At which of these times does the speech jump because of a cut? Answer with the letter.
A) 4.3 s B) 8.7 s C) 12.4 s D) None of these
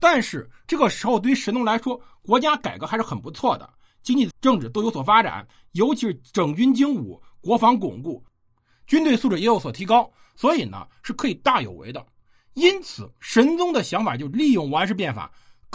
A